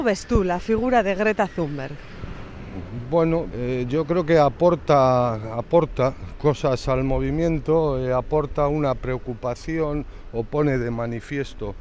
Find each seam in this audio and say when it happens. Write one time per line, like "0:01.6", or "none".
0:03.5